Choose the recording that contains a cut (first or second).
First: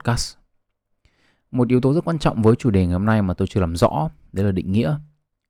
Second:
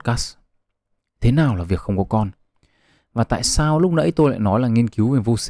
second